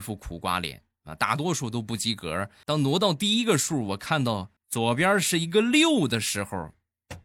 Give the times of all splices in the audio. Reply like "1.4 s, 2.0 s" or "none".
2.6 s, 4.6 s